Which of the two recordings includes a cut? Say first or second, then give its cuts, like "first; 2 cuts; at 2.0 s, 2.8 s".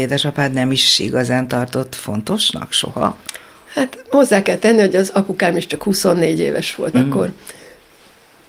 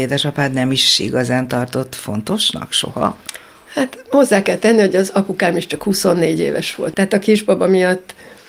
second; 1 cut; at 6.9 s